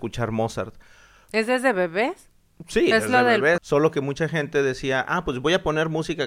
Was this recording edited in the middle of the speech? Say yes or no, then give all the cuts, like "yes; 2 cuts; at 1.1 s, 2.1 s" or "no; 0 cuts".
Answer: yes; 1 cut; at 3.6 s